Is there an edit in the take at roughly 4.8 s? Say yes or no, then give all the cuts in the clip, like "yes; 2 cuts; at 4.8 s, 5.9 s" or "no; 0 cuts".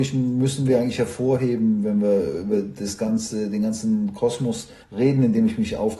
yes; 1 cut; at 4.8 s